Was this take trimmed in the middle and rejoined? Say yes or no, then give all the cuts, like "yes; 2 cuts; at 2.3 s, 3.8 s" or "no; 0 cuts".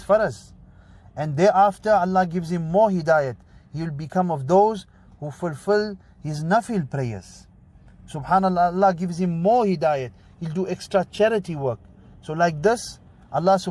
no; 0 cuts